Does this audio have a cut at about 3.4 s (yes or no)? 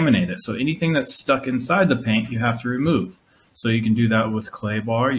no